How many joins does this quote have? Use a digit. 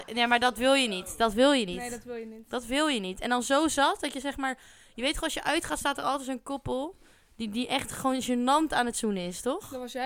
0